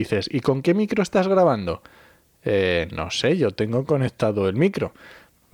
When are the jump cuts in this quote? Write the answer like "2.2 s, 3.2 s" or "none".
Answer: none